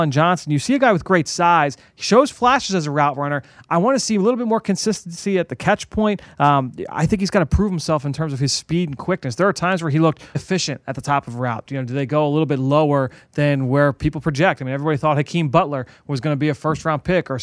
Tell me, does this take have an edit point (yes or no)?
yes